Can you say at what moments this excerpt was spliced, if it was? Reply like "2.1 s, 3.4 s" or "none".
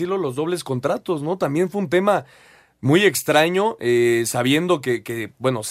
none